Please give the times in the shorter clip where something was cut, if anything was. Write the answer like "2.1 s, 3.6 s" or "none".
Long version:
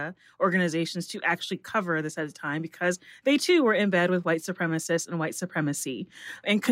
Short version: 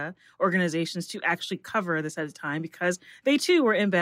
none